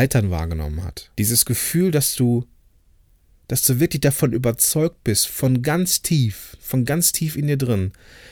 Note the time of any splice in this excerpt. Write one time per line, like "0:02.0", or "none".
0:01.1